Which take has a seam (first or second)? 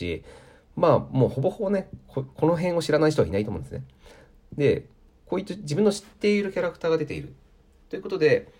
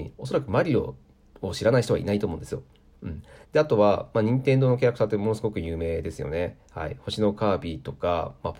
second